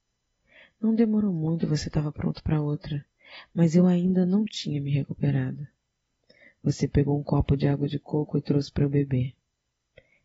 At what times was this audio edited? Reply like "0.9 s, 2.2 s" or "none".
none